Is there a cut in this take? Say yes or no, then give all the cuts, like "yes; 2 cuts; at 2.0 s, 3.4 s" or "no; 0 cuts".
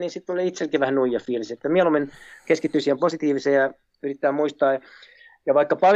no; 0 cuts